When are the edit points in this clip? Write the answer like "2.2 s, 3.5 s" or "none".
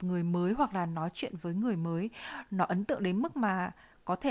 none

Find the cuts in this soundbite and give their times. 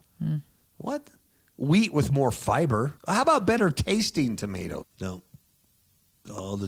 3.0 s, 4.8 s

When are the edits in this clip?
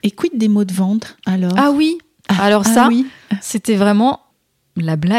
none

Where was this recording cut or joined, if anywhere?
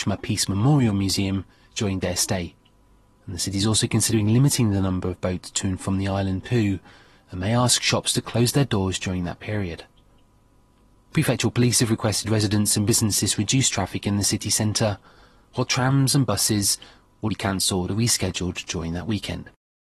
3.2 s, 17.3 s

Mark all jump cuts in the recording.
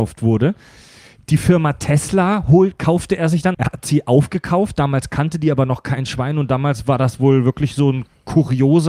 3.5 s

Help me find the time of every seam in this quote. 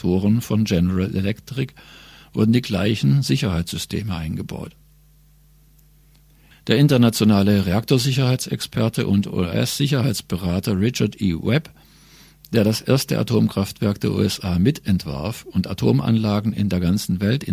none

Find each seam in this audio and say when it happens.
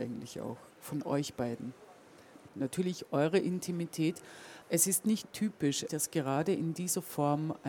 2.5 s, 4.6 s, 5.9 s

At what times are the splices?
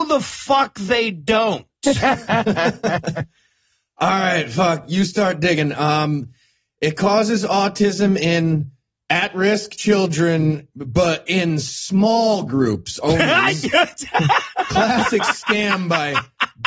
none

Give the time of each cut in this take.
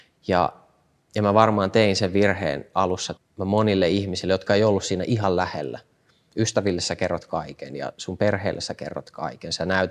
3.2 s

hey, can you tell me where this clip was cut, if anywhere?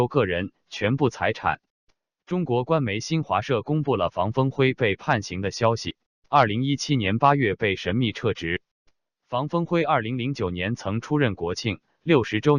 6.3 s

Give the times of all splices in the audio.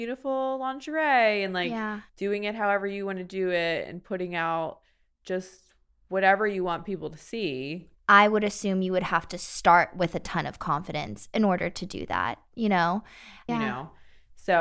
7.9 s, 13.5 s

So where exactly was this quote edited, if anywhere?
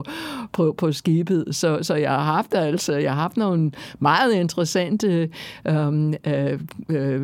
none

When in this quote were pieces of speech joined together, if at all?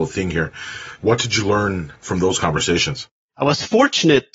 1.0 s

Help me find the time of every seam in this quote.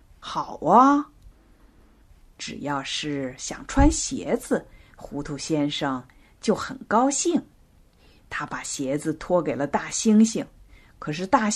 none

